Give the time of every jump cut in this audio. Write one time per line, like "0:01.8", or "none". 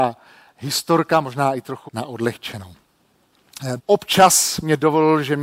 0:01.9
0:03.8